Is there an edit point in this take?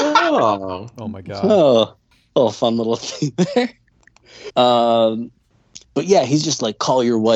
yes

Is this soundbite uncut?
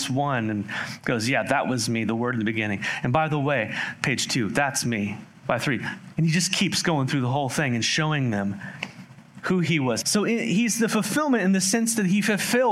no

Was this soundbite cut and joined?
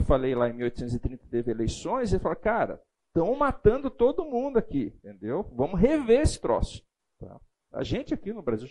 no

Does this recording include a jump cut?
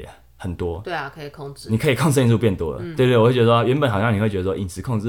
no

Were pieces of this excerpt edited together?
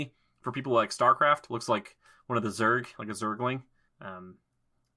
yes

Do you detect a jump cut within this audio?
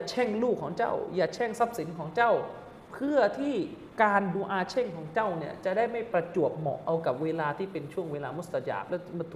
yes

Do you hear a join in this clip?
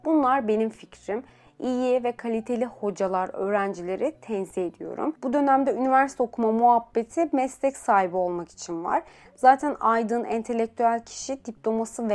yes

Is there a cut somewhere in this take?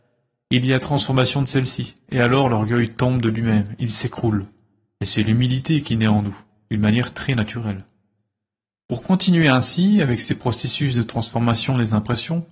no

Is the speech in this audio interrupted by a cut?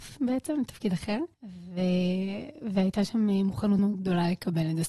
yes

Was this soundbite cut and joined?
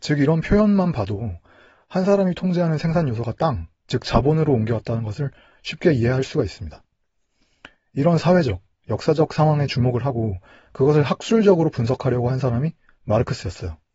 yes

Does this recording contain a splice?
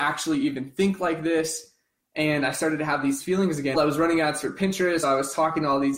yes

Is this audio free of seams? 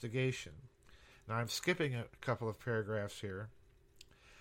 yes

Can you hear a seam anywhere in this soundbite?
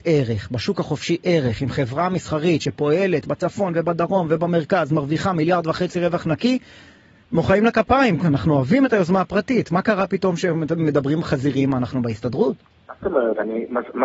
no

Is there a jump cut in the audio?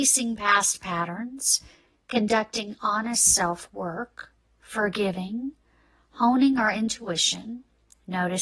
no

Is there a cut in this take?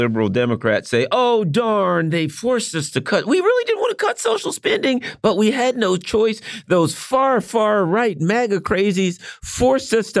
no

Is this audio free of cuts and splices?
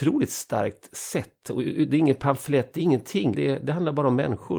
no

